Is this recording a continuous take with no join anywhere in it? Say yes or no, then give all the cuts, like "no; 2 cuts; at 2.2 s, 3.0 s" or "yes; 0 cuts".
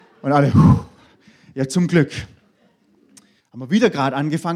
no; 1 cut; at 3.4 s